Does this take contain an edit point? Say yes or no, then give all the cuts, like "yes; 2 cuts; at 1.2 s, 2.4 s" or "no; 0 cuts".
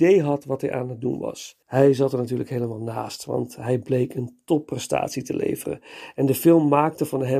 yes; 1 cut; at 1.6 s